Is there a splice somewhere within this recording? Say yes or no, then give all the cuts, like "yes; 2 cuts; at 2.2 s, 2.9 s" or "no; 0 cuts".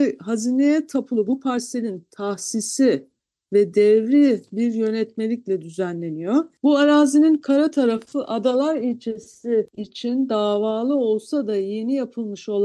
yes; 1 cut; at 6.6 s